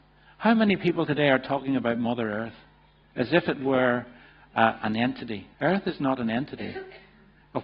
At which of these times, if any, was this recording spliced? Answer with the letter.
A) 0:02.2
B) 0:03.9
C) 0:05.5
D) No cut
C